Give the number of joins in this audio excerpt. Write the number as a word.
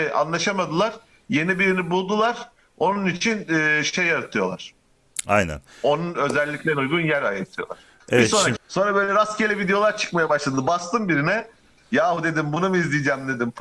two